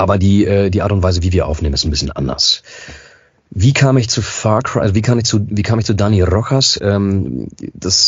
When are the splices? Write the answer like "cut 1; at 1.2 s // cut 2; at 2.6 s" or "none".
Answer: none